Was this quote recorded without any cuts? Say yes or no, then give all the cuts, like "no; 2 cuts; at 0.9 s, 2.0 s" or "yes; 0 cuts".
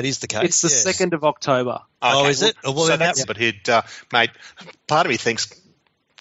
no; 1 cut; at 3.2 s